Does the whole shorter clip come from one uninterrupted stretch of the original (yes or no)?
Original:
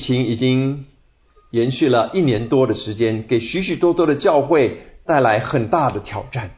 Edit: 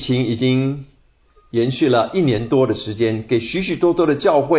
yes